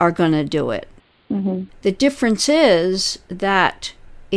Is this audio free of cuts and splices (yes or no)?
no